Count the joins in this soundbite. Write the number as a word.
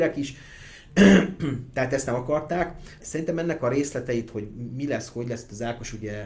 one